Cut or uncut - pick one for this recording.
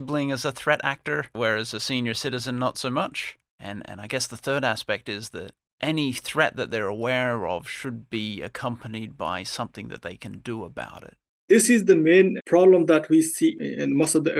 cut